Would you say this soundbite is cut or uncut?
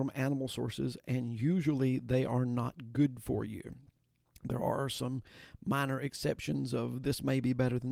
uncut